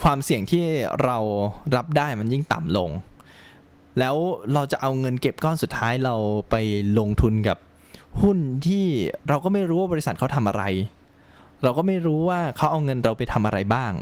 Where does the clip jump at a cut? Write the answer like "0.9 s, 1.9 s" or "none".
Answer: none

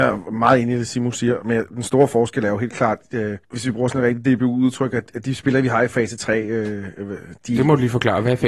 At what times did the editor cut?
3.4 s

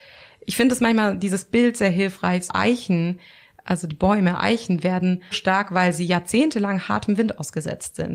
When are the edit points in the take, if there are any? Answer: 2.5 s, 5.3 s

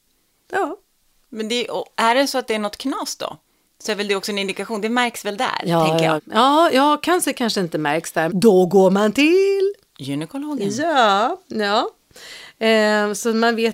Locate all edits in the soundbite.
6.2 s, 8.3 s

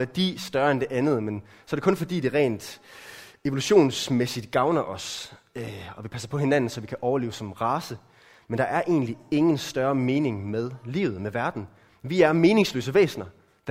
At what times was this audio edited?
none

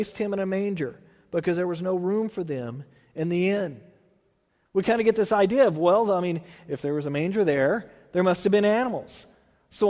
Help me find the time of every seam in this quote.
none

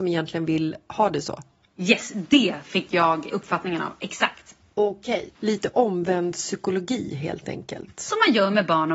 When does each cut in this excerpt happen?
3.3 s, 5.3 s

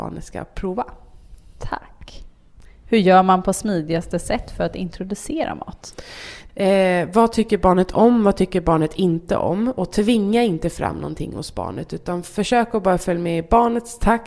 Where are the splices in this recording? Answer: 6.5 s

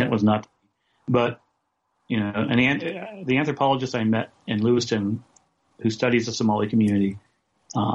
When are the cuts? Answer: none

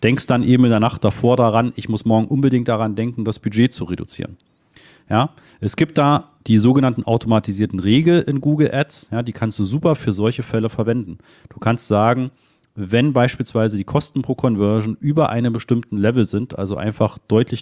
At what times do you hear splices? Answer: none

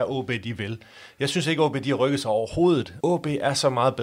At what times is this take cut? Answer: 3.0 s

